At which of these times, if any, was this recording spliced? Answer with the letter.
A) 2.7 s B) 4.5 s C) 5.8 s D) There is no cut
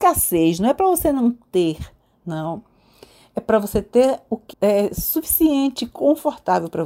B